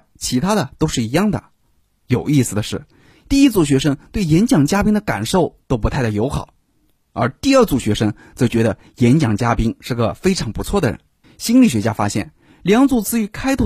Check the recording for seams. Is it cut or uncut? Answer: cut